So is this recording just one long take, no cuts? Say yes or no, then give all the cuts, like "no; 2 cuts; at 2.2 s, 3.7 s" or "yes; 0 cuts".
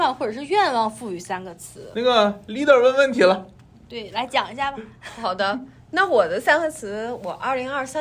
yes; 0 cuts